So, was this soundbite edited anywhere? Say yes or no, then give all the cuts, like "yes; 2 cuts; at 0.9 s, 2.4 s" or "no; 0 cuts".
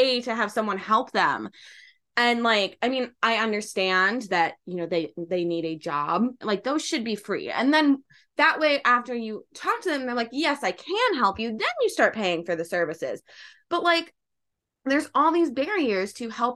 yes; 1 cut; at 6.4 s